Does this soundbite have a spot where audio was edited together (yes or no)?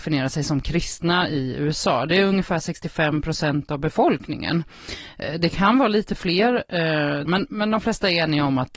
yes